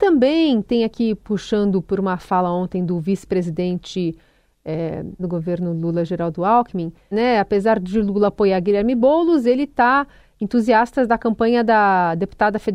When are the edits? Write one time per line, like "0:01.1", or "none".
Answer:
0:05.2
0:07.1